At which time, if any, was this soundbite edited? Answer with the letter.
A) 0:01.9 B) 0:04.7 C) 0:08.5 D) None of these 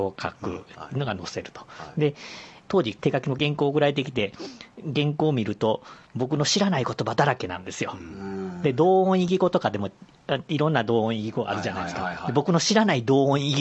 D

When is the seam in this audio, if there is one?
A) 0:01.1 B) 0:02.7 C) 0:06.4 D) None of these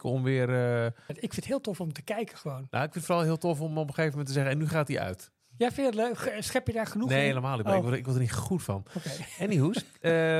A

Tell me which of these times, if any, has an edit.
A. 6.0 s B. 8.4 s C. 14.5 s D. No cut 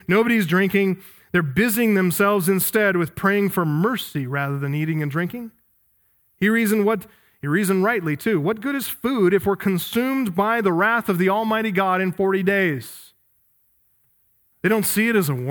C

